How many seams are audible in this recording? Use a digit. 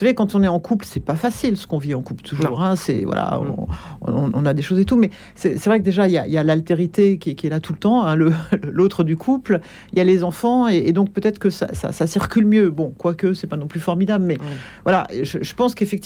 0